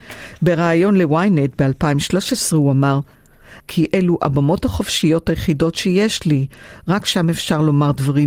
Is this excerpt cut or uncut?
cut